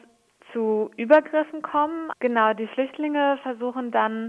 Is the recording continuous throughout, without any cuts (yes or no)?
no